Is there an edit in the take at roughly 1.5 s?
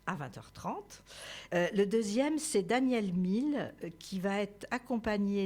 yes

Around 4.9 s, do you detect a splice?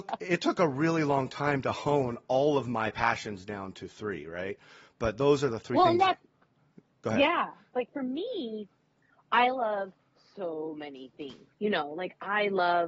no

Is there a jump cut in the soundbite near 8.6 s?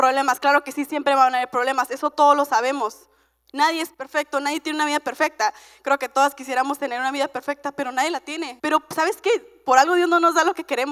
yes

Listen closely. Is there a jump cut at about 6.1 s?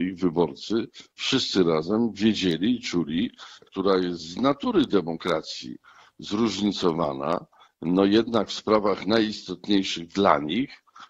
no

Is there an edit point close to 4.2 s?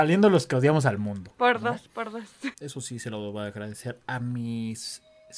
no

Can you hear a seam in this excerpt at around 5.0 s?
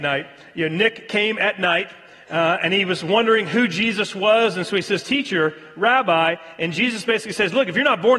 no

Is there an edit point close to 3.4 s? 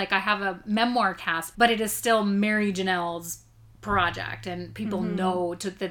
no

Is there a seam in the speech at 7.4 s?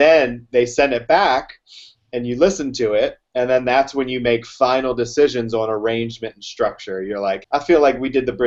yes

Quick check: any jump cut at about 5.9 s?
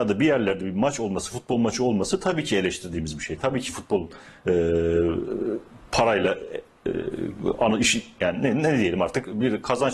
no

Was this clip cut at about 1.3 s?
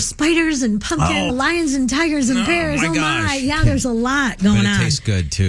yes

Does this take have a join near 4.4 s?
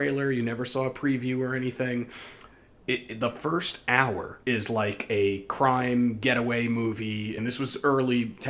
yes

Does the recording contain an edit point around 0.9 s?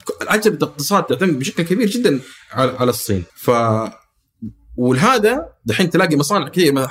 no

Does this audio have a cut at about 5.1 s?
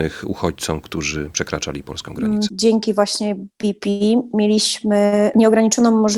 no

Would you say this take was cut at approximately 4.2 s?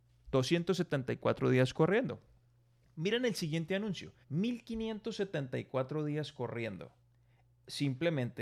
yes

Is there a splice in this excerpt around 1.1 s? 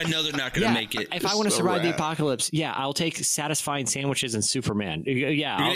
no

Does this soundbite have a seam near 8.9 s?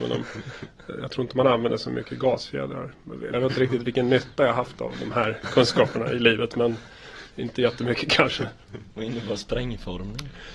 no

